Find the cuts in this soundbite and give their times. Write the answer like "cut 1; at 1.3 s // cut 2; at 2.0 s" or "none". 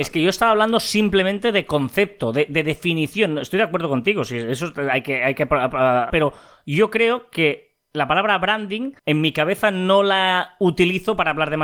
cut 1; at 6.1 s // cut 2; at 9.0 s